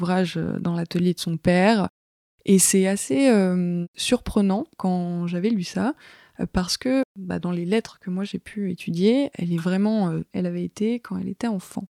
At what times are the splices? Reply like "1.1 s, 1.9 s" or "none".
10.3 s